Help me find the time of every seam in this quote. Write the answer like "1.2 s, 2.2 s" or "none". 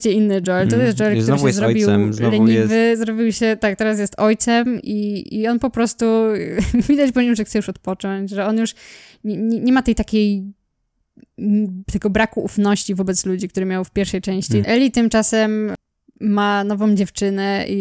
4.8 s, 14.6 s